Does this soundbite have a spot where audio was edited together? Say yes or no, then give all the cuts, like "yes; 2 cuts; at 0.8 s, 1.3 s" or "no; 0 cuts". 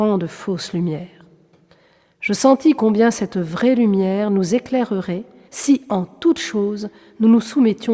yes; 1 cut; at 5.4 s